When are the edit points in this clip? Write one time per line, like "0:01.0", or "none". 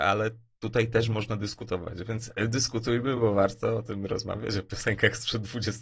none

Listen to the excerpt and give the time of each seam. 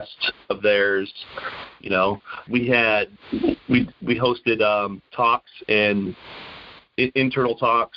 0:02.5

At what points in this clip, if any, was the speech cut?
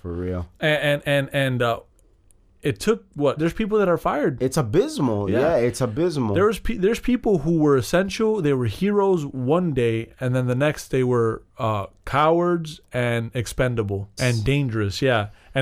0:03.4
0:14.2

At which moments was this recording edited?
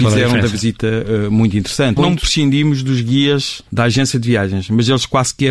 0:02.0
0:03.7

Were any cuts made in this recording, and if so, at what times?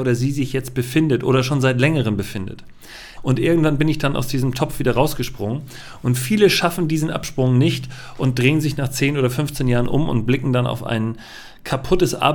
0:03.2

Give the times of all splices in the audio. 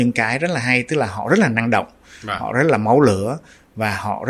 none

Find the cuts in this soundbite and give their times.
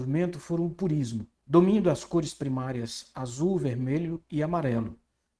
0:01.4

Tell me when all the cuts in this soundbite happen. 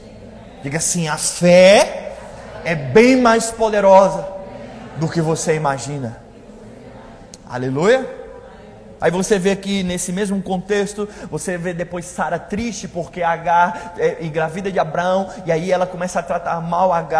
0:09.0

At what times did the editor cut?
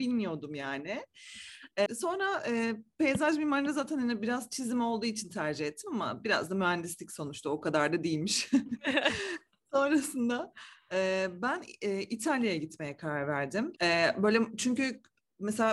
0:01.9
0:13.8

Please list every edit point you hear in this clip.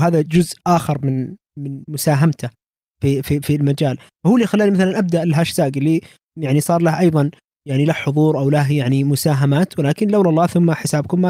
none

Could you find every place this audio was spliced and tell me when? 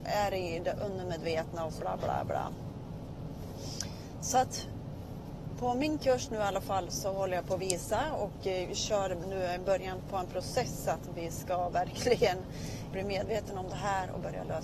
0:01.8
0:12.9

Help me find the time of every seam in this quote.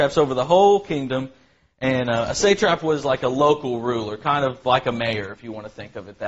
none

